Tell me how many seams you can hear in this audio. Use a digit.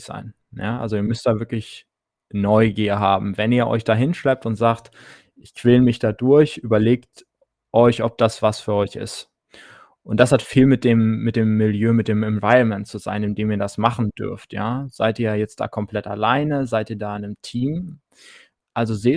0